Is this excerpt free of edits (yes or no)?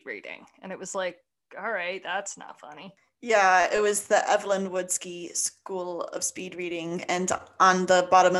yes